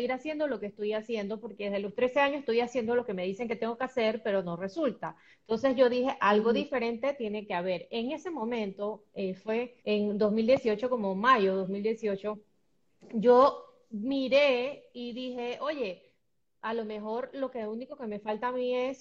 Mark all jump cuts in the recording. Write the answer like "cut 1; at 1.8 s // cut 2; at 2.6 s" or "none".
cut 1; at 9.8 s